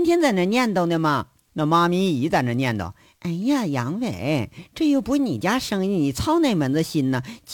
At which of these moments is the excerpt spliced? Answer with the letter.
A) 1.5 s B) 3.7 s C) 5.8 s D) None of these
A